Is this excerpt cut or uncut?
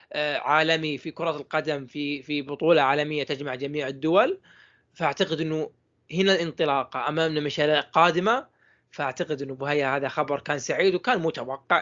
uncut